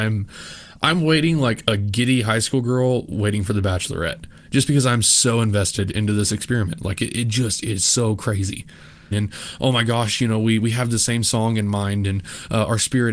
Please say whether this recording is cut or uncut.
cut